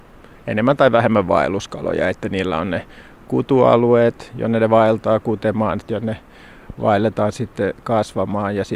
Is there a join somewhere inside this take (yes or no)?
yes